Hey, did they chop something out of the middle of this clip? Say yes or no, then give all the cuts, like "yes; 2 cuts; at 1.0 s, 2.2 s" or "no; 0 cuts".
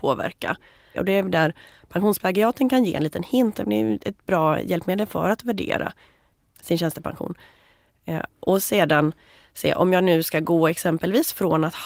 yes; 1 cut; at 0.9 s